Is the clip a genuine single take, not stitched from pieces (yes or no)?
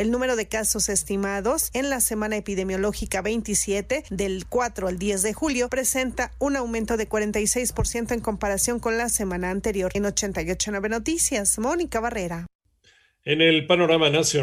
yes